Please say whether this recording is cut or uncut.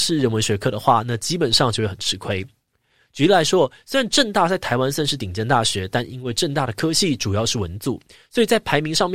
uncut